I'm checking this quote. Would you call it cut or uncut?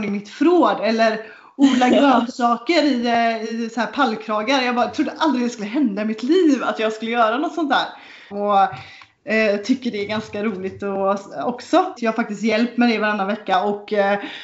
cut